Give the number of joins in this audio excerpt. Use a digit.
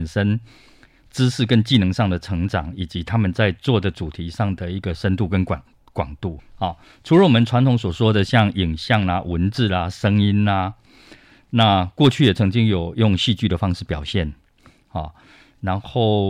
1